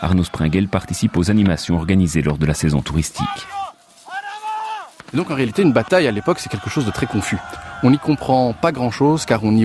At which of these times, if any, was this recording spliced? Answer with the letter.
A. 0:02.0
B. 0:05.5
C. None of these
C